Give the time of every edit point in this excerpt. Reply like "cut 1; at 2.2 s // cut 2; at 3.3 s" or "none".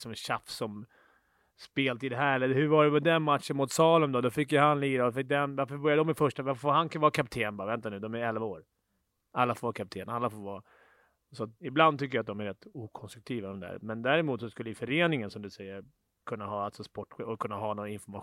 cut 1; at 11.6 s